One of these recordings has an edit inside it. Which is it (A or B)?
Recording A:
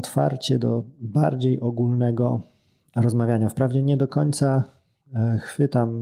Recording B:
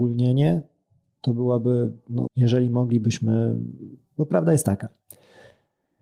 B